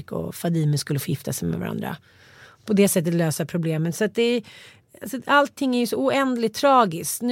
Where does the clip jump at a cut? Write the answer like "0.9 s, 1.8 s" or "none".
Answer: none